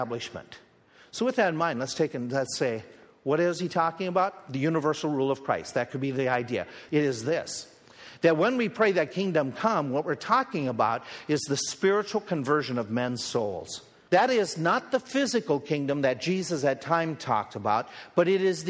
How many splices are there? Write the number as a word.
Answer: two